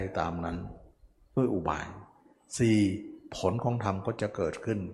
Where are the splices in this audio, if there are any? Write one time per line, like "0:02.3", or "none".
none